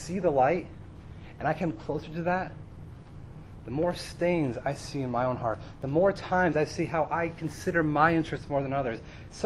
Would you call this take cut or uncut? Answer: uncut